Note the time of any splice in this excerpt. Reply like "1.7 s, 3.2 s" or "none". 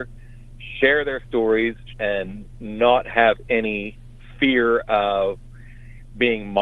1.9 s